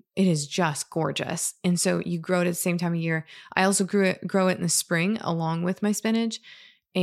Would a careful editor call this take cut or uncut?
uncut